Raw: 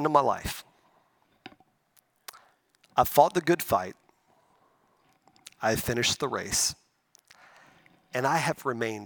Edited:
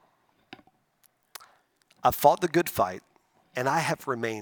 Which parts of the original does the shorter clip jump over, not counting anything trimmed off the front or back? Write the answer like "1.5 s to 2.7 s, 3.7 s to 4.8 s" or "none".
4.3 s to 8.0 s